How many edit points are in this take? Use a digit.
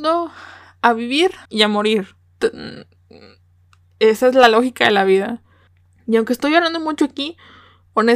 1